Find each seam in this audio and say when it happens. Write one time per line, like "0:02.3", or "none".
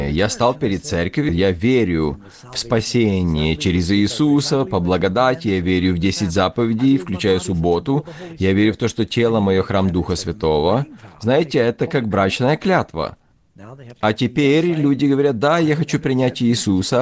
0:01.3